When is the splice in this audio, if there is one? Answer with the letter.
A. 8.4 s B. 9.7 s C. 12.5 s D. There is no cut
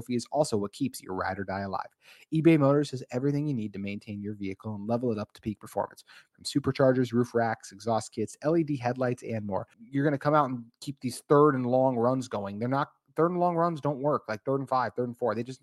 B